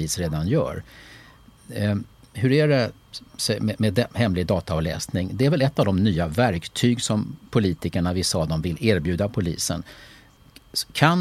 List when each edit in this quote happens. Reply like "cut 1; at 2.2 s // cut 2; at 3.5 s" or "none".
none

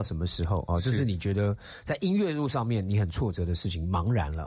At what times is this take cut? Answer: none

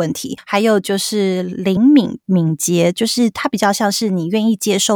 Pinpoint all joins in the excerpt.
none

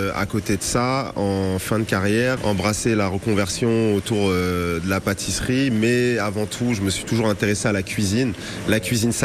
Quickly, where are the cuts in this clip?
cut 1; at 2.4 s

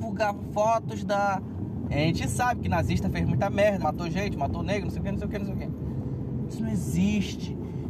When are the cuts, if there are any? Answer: cut 1; at 1.9 s // cut 2; at 3.8 s // cut 3; at 6.5 s

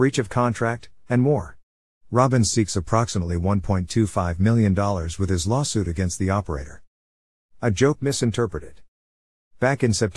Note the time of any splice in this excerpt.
none

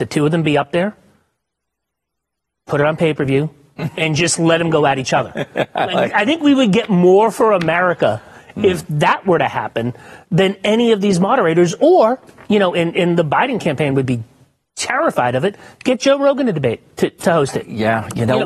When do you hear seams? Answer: none

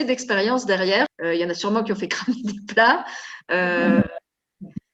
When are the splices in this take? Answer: cut 1; at 1.1 s

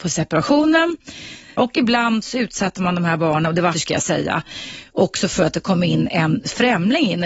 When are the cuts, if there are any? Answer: cut 1; at 1.6 s // cut 2; at 3.7 s

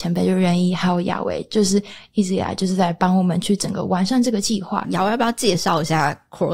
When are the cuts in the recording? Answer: cut 1; at 4.8 s

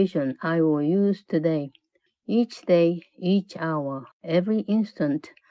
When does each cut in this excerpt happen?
cut 1; at 2.1 s // cut 2; at 4.1 s

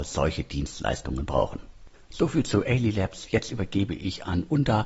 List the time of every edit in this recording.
none

